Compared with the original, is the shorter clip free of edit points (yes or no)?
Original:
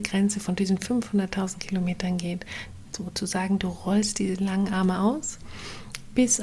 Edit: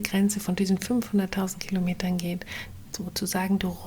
yes